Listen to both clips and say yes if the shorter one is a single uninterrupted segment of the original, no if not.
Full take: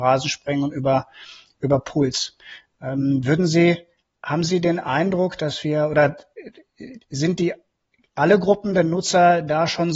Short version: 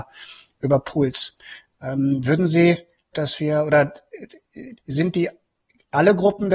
no